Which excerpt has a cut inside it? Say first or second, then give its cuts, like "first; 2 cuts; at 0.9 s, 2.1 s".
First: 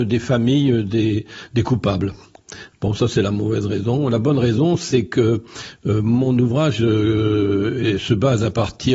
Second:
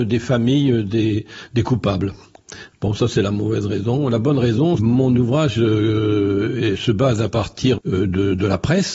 second; 2 cuts; at 4.8 s, 7.8 s